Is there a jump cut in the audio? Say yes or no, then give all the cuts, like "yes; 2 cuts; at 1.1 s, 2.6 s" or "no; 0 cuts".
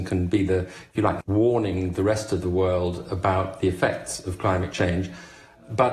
yes; 1 cut; at 1.2 s